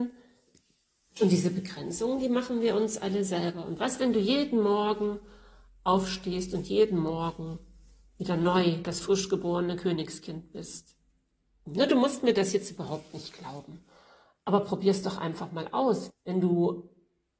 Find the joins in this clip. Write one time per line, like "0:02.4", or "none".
0:11.7
0:16.1